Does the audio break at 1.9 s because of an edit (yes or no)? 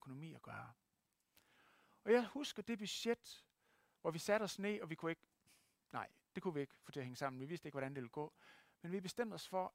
no